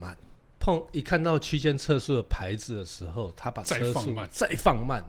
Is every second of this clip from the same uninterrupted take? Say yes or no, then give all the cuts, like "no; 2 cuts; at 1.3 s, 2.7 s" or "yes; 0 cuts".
yes; 0 cuts